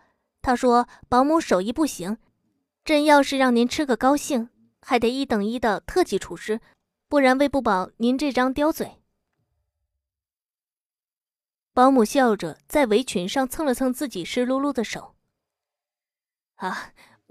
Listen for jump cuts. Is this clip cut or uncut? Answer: uncut